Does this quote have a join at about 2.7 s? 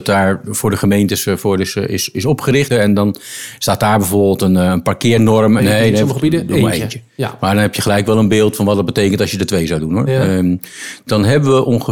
yes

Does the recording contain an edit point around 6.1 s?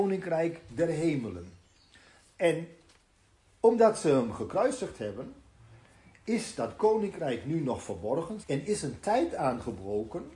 no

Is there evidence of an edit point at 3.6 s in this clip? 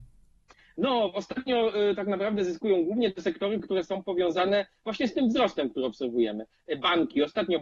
no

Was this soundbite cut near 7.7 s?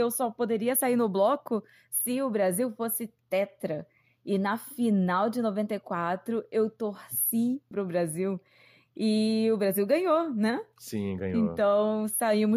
yes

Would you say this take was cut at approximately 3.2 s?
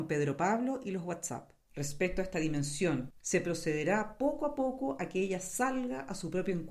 yes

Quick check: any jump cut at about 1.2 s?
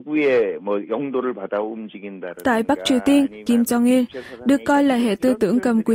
no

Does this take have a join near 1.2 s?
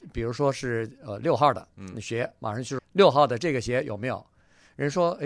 no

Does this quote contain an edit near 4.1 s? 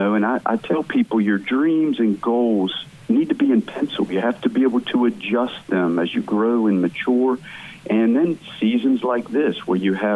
no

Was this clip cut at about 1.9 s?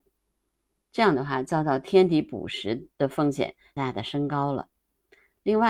no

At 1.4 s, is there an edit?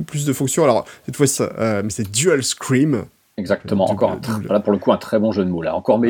yes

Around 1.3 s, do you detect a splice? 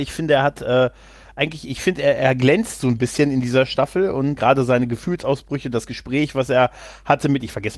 no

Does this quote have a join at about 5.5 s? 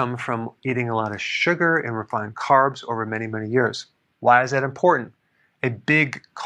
no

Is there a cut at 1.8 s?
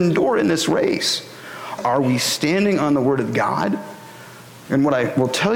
yes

